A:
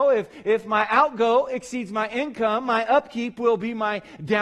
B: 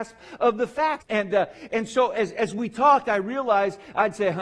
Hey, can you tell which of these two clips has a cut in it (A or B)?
B